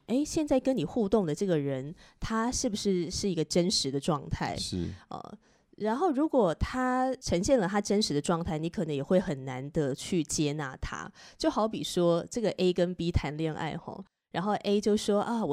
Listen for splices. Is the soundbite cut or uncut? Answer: uncut